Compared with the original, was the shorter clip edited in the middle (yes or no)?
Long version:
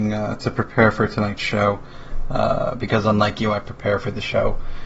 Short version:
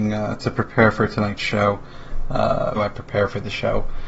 yes